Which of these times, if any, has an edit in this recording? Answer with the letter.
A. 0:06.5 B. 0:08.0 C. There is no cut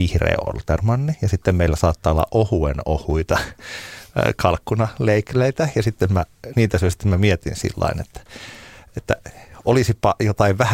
A